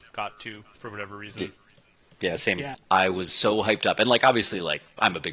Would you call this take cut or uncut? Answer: cut